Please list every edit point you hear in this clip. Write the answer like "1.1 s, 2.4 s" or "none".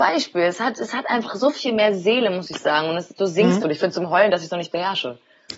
3.6 s